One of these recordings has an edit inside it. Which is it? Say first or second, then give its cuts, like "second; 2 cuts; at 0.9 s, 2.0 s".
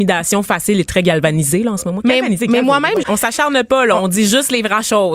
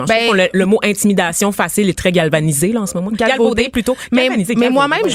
first; 2 cuts; at 2.0 s, 3.0 s